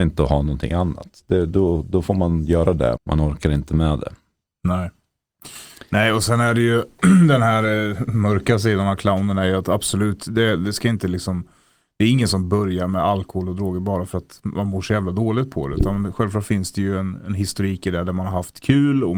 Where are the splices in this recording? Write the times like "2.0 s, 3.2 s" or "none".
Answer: 3.0 s